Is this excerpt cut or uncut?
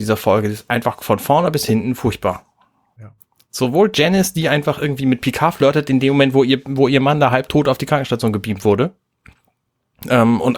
uncut